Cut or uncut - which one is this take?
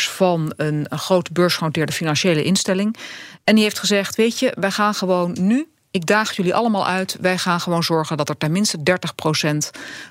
uncut